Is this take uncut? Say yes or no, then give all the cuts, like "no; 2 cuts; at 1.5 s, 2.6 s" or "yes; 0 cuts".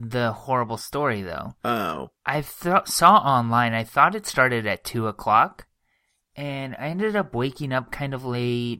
yes; 0 cuts